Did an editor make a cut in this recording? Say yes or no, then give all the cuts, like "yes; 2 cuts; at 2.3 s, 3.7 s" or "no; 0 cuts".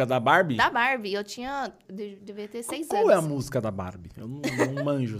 yes; 1 cut; at 1.8 s